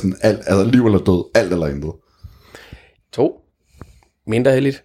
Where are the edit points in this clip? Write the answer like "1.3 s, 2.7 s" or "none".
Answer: 3.0 s